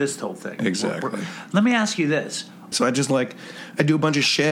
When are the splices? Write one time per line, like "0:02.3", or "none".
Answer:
0:02.7